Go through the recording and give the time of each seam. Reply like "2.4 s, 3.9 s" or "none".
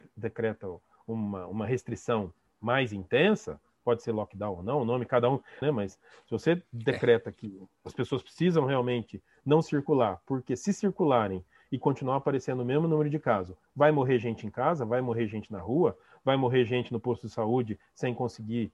5.6 s